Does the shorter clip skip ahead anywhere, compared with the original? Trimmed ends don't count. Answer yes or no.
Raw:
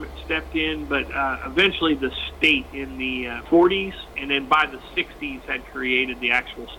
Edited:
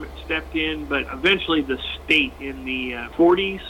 yes